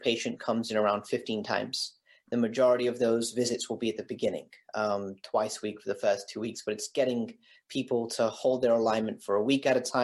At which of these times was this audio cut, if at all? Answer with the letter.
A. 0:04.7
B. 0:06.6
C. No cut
C